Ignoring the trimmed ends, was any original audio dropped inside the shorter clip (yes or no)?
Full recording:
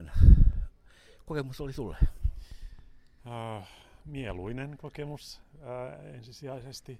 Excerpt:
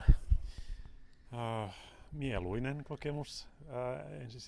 no